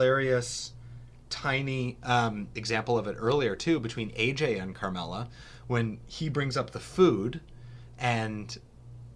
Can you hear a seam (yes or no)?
no